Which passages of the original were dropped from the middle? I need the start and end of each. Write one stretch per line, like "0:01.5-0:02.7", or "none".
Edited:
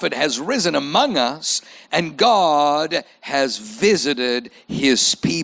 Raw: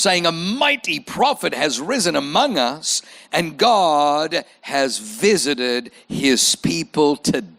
none